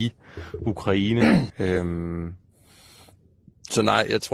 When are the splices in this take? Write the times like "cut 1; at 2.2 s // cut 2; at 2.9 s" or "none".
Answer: cut 1; at 1.5 s